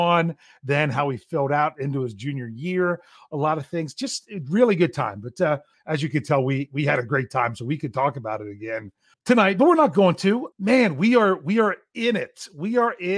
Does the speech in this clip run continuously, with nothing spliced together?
no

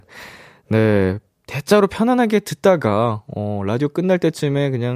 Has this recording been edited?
no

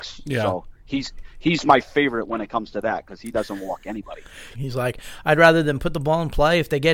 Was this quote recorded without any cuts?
no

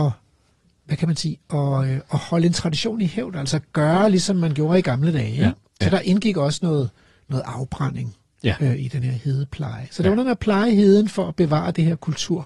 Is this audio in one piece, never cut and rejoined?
yes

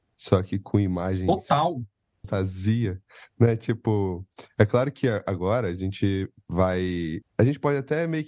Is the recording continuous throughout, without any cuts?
no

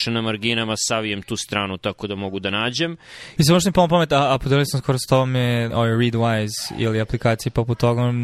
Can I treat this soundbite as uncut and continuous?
no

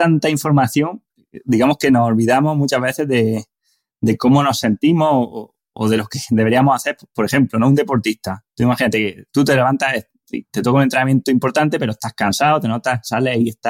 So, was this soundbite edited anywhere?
no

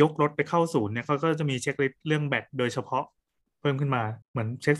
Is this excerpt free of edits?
yes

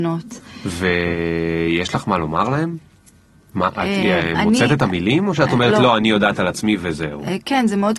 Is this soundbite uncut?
yes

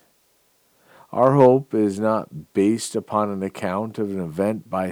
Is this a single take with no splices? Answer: yes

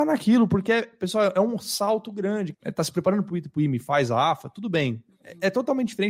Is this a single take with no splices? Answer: no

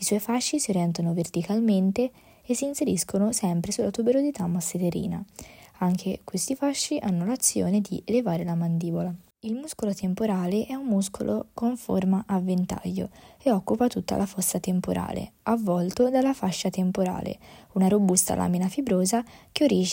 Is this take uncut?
yes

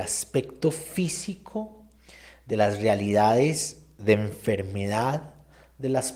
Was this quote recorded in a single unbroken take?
yes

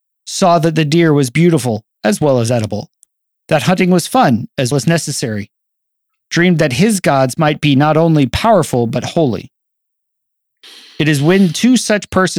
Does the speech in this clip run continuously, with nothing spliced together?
no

